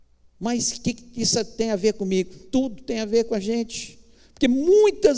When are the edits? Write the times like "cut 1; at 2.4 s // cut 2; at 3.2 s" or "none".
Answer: none